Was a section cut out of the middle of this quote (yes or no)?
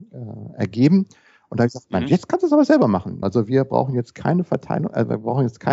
yes